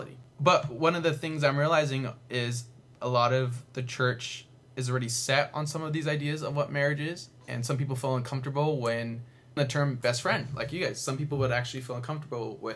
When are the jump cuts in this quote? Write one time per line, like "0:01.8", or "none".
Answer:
0:09.6